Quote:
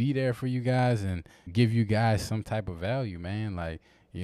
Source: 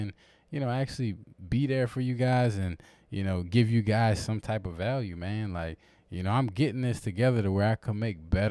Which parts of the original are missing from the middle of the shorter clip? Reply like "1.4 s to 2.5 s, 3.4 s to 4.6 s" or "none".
3.0 s to 3.4 s